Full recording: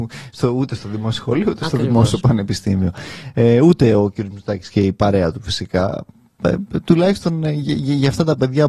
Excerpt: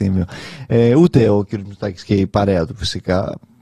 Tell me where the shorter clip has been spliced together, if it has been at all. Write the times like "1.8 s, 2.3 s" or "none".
none